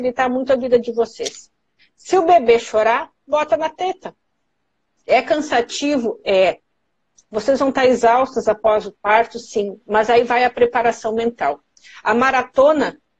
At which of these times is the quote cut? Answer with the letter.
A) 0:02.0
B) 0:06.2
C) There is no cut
C